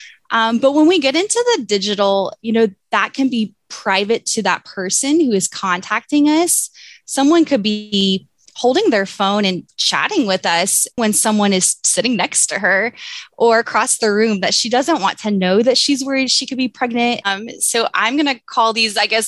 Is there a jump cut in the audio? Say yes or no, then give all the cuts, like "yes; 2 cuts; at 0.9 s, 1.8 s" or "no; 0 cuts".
yes; 2 cuts; at 11.0 s, 17.2 s